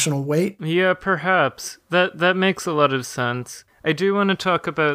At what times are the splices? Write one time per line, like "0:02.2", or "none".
none